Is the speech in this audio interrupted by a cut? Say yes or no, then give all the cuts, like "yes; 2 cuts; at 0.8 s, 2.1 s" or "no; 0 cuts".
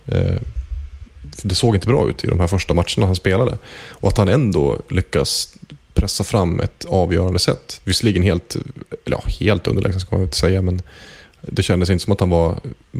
no; 0 cuts